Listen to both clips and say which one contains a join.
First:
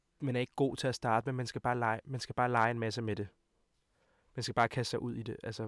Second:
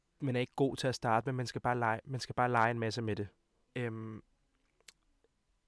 second; 1 cut; at 3.7 s

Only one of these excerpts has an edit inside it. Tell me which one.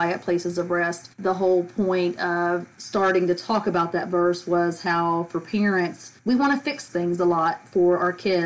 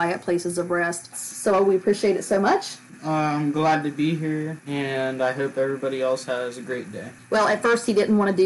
second; 1 cut; at 1.1 s

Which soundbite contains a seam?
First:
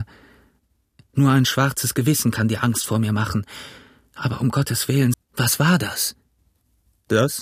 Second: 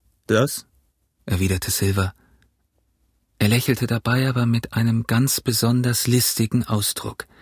first; 1 cut; at 5.1 s

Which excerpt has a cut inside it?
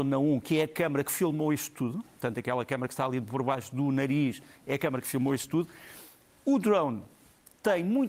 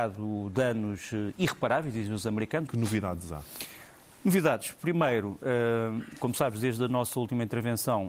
second; 1 cut; at 2.7 s

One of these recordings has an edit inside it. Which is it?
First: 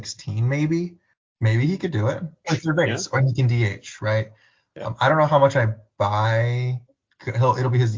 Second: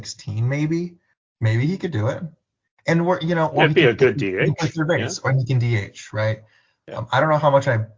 first; 1 cut; at 2.4 s

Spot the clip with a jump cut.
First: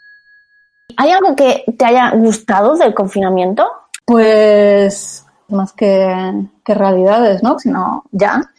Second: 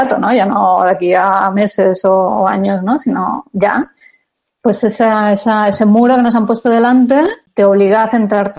first; 3 cuts; at 4.0 s, 5.5 s, 7.6 s

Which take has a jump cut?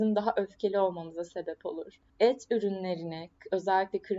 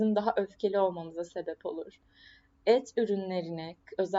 first; 1 cut; at 2.1 s

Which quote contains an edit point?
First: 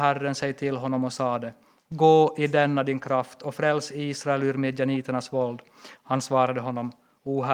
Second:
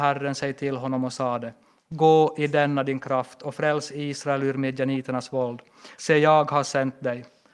first; 1 cut; at 6.0 s

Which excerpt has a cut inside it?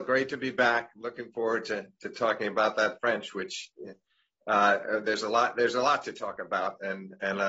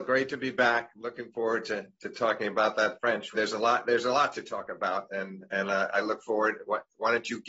second; 1 cut; at 3.3 s

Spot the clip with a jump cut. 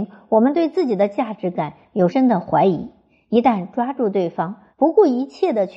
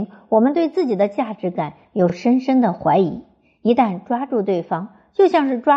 first; 2 cuts; at 2.1 s, 4.7 s

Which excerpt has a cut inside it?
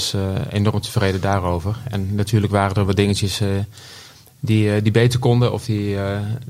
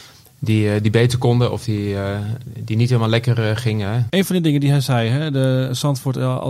second; 1 cut; at 4.1 s

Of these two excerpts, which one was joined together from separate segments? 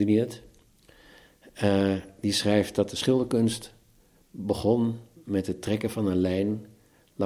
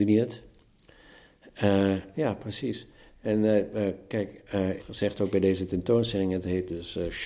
second; 2 cuts; at 2.1 s, 4.8 s

